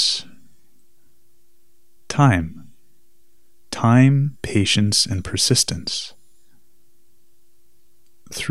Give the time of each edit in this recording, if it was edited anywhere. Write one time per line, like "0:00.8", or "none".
none